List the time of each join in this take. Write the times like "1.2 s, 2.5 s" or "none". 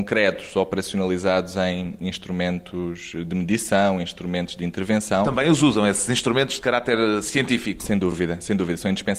none